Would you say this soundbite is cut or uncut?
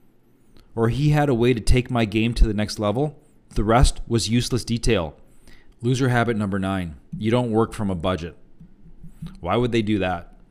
cut